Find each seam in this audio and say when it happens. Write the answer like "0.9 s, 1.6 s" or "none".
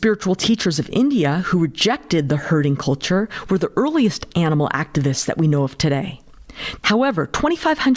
6.8 s